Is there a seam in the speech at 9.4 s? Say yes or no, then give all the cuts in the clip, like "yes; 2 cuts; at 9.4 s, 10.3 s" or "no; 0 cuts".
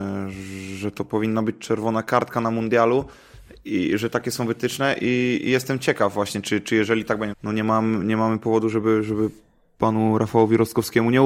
no; 1 cut; at 7.3 s